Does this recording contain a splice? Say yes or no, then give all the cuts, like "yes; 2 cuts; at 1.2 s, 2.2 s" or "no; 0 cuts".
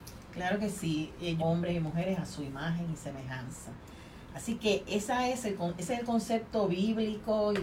yes; 1 cut; at 1.4 s